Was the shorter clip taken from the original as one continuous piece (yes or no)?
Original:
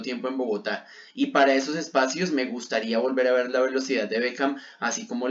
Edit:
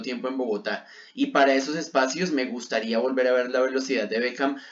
yes